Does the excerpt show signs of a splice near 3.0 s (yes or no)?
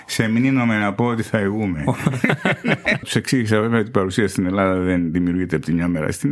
yes